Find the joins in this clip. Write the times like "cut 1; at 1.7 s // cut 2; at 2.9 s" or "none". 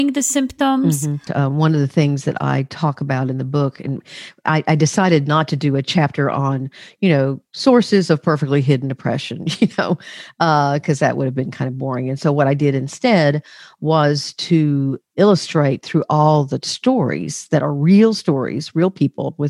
cut 1; at 1.3 s

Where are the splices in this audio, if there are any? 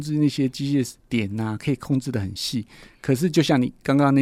cut 1; at 1.0 s

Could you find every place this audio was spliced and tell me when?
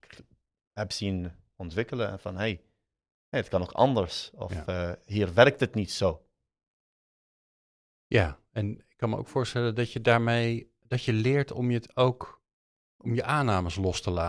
none

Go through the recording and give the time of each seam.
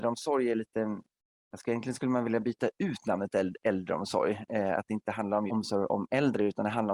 cut 1; at 5.5 s

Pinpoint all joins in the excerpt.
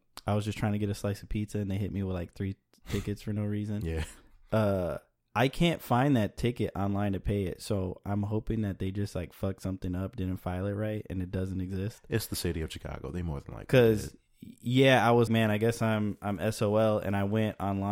cut 1; at 15.3 s

